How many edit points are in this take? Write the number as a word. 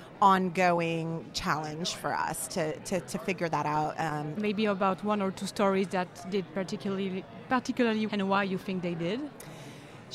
two